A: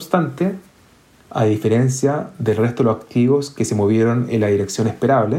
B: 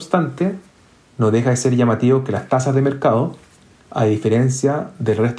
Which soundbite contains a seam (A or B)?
A